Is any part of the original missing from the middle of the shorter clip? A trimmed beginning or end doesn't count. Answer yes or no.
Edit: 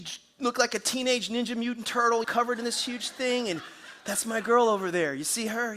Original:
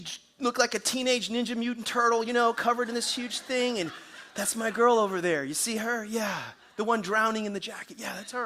yes